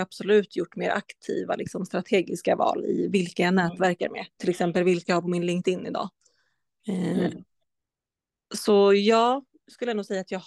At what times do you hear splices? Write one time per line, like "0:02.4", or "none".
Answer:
0:04.4